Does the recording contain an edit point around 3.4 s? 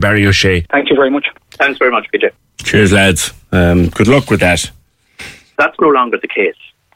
no; 1 cut; at 5.5 s

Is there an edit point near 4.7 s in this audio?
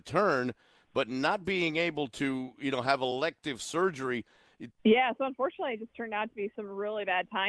yes; 1 cut; at 4.7 s

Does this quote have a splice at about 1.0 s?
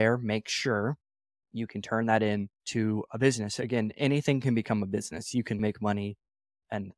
no; 2 cuts; at 2.6 s, 5.6 s

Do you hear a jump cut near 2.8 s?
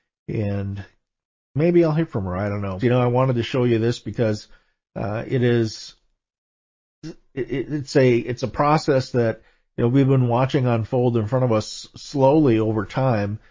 yes; 1 cut; at 2.8 s

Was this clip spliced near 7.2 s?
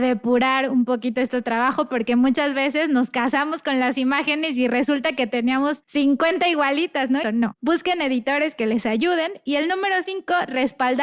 yes; 1 cut; at 7.2 s

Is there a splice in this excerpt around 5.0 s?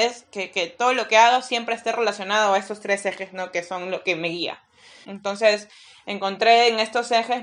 yes; 1 cut; at 5.0 s

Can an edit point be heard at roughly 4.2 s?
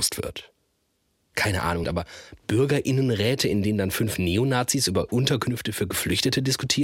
no; 1 cut; at 1.8 s

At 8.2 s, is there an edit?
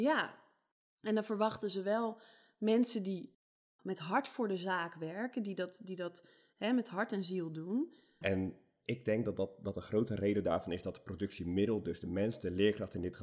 yes; 1 cut; at 8.2 s

